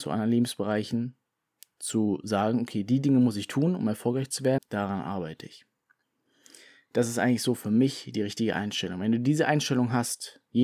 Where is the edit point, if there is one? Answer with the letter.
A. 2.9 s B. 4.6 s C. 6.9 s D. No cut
B